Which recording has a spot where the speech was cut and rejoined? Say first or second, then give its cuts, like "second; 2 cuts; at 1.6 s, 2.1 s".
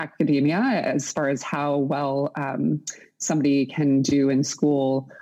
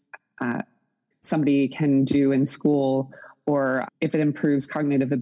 second; 2 cuts; at 1.1 s, 3.9 s